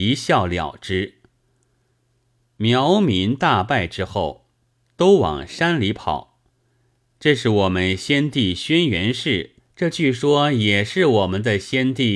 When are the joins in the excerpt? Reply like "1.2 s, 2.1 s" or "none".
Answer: 9.6 s

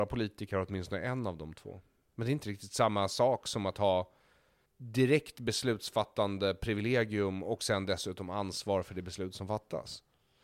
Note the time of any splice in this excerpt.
2.1 s, 4.7 s

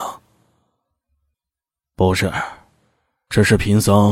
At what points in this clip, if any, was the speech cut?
none

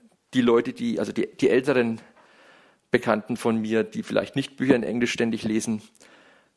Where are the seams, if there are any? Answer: none

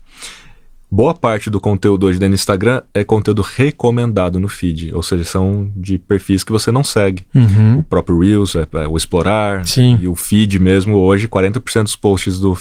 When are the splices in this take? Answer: none

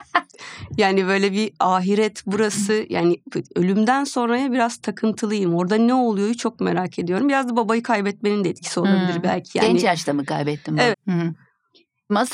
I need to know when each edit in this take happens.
10.9 s

